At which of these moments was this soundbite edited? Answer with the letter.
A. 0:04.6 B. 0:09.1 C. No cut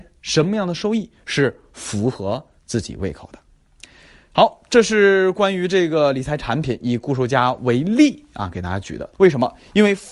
B